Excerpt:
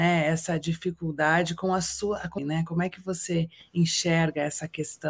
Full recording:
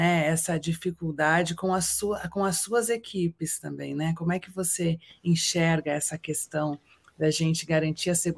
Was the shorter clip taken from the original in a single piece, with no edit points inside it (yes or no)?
no